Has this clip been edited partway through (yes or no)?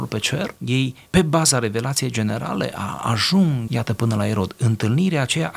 yes